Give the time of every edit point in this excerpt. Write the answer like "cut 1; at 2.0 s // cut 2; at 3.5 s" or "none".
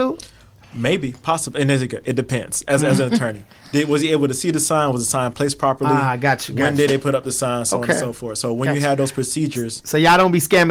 none